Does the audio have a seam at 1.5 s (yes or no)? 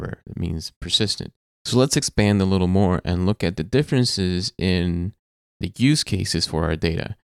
yes